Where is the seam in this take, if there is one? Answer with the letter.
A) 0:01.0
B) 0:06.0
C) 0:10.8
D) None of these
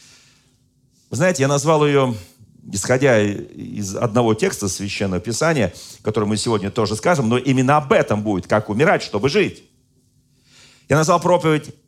D